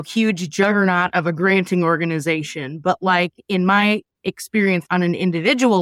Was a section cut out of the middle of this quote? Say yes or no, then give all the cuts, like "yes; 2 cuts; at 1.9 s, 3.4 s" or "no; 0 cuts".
yes; 1 cut; at 4.8 s